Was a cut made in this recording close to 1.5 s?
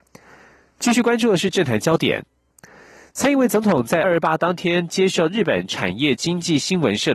no; 1 cut; at 4.0 s

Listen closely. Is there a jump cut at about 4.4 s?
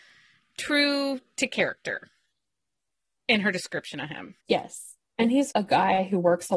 yes; 2 cuts; at 4.4 s, 5.5 s

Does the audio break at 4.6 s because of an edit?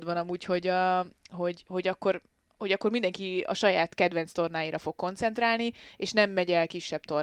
no; 1 cut; at 1.6 s

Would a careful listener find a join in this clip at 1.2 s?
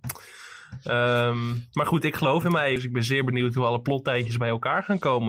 no; 1 cut; at 2.8 s

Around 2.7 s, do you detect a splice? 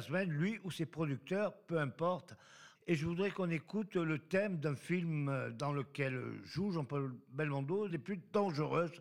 yes; 2 cuts; at 2.7 s, 7.9 s

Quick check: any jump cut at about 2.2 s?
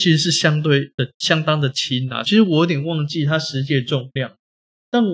yes; 1 cut; at 2.2 s

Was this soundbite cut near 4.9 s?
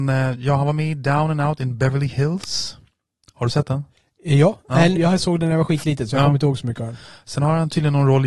yes; 1 cut; at 4.9 s

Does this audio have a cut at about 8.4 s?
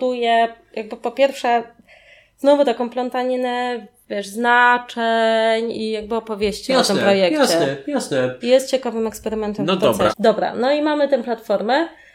yes; 2 cuts; at 8.4 s, 10.1 s

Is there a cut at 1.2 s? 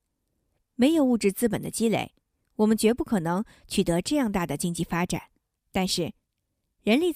no; 1 cut; at 5.6 s

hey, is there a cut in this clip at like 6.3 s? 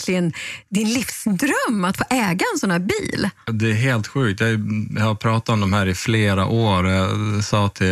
no; 1 cut; at 3.5 s

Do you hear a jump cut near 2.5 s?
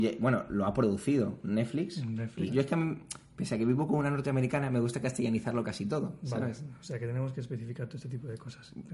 yes; 1 cut; at 2.5 s

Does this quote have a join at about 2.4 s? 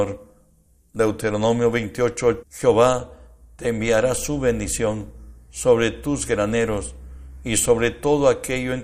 yes; 1 cut; at 2.4 s

